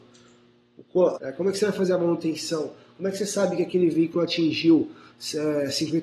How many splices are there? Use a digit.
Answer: 1